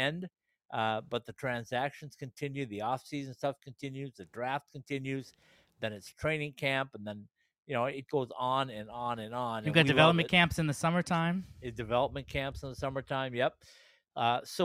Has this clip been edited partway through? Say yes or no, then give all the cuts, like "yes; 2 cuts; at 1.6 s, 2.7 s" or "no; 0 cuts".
yes; 1 cut; at 8.1 s